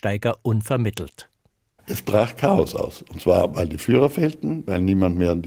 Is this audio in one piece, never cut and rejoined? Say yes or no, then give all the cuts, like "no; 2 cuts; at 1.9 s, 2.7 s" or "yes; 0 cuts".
yes; 0 cuts